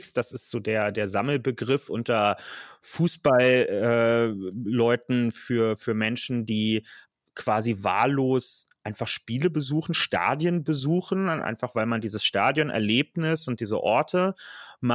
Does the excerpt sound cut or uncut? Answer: uncut